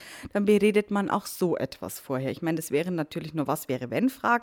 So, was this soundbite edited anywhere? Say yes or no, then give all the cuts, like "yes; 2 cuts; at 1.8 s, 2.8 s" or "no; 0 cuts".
no; 0 cuts